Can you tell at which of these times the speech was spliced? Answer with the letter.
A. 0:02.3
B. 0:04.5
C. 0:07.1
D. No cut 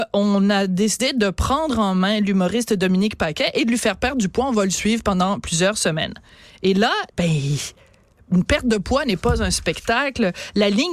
C